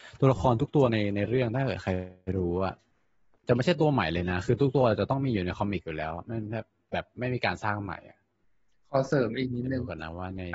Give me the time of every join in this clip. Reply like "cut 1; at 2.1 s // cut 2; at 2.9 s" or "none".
none